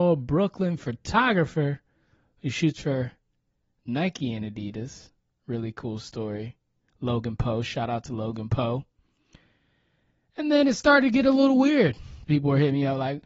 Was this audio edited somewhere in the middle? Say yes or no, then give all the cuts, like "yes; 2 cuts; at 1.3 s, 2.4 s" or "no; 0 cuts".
yes; 1 cut; at 12.2 s